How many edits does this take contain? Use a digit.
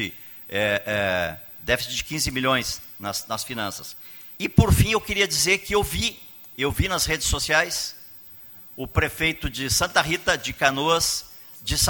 1